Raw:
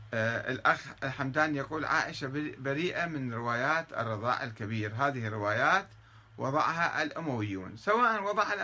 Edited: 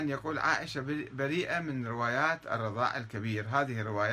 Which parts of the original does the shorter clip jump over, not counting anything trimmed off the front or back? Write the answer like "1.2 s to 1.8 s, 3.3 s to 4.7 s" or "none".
none